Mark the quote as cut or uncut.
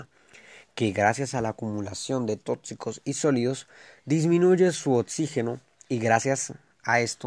uncut